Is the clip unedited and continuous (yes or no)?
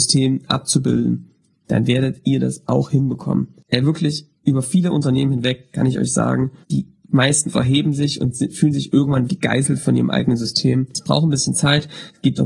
no